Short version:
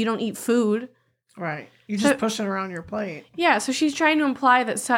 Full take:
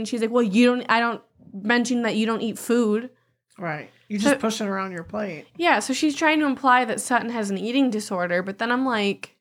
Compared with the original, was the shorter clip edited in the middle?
no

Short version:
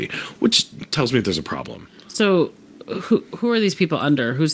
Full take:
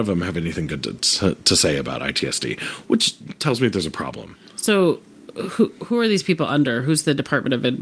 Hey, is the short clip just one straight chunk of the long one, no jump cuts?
yes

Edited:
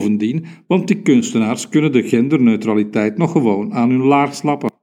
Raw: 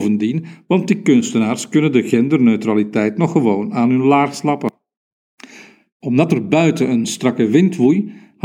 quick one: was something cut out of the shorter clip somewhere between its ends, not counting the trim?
no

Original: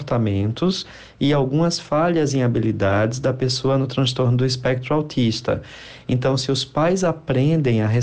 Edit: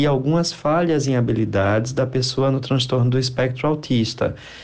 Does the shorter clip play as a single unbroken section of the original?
yes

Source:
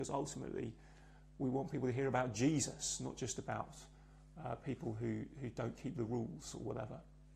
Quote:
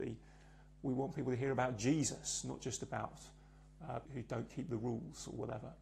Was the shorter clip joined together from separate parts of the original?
yes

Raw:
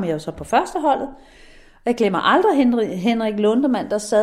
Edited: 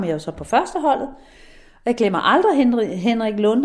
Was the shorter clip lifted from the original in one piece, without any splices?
yes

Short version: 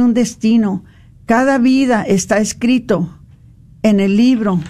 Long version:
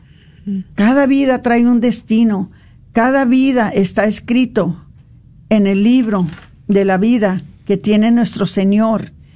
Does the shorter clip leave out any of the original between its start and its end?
no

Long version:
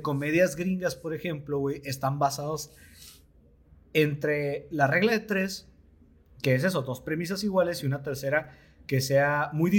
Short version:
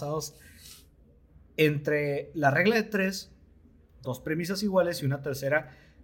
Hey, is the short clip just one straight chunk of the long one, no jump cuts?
no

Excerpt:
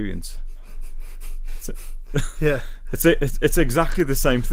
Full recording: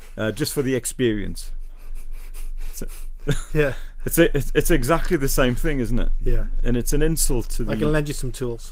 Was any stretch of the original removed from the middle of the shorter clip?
no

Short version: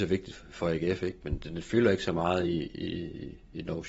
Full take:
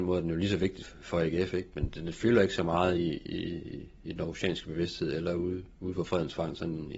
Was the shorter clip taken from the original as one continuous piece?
yes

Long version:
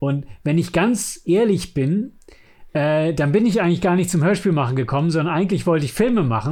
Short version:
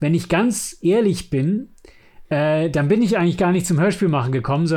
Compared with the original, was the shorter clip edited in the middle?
no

